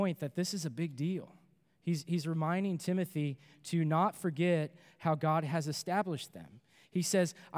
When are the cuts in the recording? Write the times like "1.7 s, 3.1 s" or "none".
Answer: none